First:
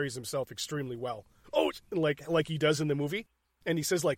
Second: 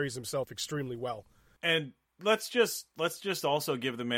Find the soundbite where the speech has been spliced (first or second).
first